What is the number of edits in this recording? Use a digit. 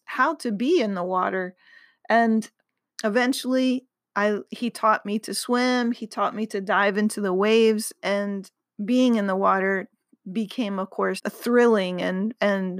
1